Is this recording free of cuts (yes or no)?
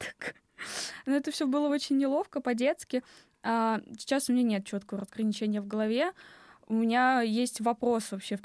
yes